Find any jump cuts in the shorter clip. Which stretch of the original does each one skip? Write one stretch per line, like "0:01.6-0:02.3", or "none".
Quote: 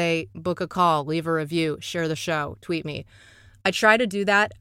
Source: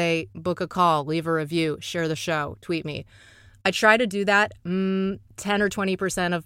none